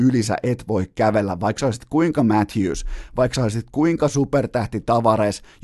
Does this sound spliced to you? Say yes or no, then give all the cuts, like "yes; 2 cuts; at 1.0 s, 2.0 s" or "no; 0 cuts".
no; 0 cuts